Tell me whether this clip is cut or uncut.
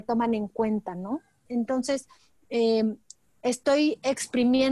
cut